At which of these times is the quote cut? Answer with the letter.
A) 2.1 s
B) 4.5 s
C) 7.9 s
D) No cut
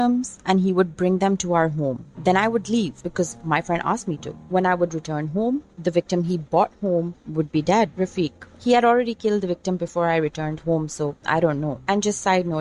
C